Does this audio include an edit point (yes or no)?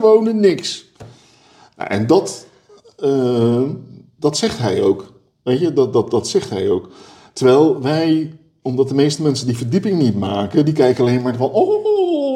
no